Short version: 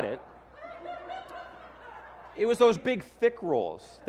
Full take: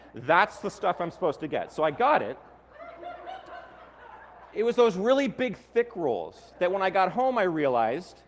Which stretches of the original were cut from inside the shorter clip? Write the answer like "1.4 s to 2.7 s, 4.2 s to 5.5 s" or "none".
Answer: 4.9 s to 5.3 s